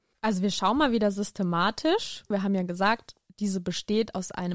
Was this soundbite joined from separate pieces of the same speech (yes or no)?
yes